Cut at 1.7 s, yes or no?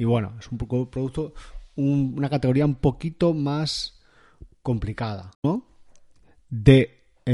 no